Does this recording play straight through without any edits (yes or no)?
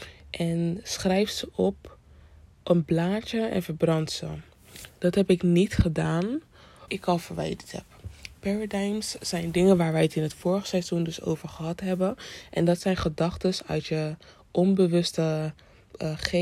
no